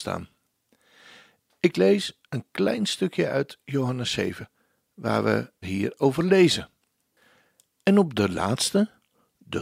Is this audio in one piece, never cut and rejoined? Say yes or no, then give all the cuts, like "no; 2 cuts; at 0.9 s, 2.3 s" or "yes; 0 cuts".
no; 1 cut; at 5.6 s